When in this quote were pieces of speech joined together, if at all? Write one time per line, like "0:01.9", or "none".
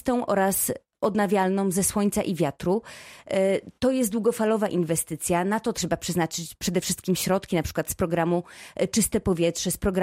none